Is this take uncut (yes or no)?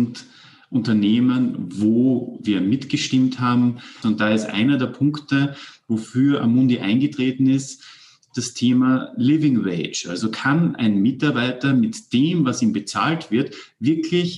no